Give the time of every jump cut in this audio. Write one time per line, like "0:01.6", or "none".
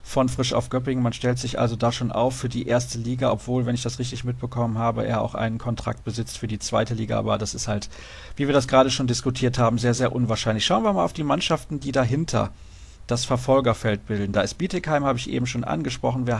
none